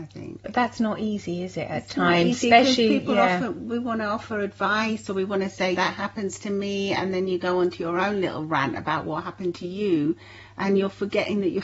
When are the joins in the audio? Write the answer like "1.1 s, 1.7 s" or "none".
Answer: 5.7 s